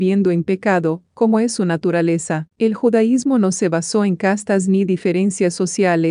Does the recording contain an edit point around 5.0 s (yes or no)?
no